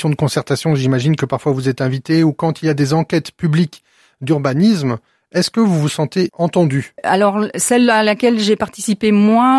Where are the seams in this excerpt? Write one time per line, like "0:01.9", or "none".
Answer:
none